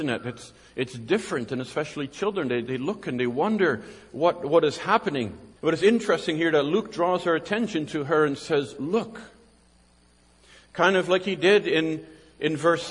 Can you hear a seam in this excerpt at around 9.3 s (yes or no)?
no